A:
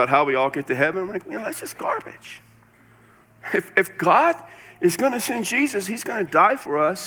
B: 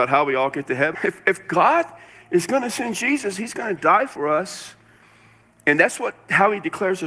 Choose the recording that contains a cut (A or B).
B